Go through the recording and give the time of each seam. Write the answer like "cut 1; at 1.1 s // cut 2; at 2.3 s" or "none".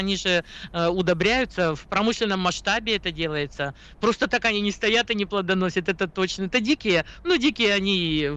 none